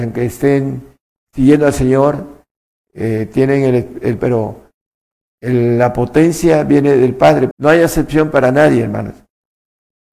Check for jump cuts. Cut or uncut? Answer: cut